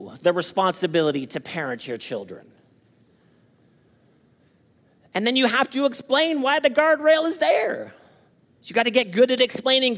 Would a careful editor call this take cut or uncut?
uncut